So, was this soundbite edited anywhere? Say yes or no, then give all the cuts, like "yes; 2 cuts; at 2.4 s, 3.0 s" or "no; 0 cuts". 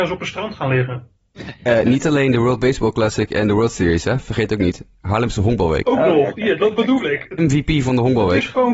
yes; 1 cut; at 7.4 s